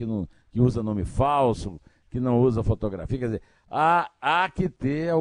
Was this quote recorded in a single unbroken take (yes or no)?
yes